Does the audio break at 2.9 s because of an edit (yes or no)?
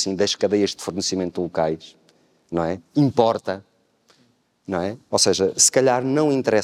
no